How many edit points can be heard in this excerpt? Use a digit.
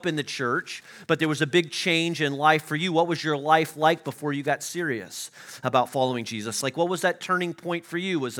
1